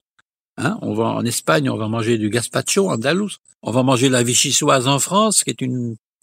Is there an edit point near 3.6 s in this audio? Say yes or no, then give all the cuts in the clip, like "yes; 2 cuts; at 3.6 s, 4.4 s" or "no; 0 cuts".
yes; 1 cut; at 3.6 s